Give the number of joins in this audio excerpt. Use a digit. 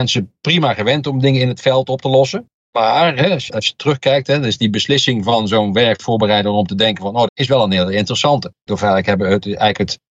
3